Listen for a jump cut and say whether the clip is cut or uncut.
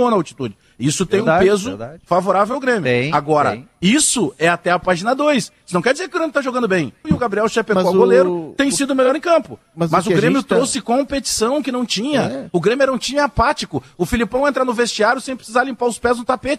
cut